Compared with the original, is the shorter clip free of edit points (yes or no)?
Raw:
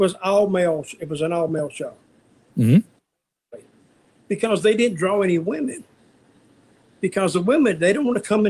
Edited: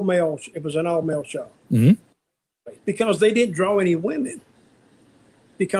no